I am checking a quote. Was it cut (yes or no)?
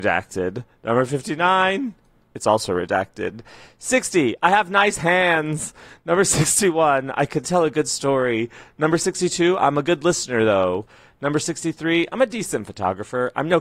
no